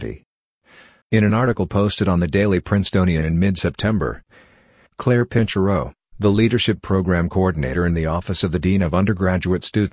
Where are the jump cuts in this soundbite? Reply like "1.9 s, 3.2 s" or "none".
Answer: 1.0 s

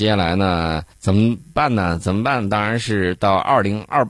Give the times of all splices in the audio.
0.9 s

